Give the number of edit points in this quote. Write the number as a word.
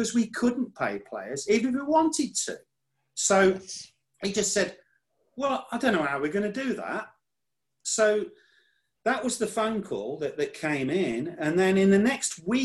zero